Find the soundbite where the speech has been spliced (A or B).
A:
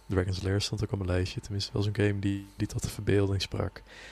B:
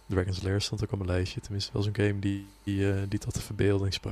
A